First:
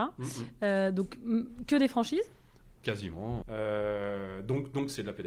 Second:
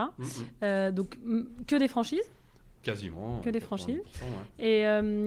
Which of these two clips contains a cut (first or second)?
first